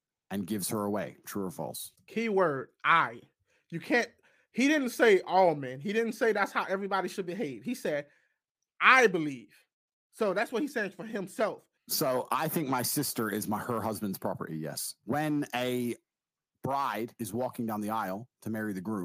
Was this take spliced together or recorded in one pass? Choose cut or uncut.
cut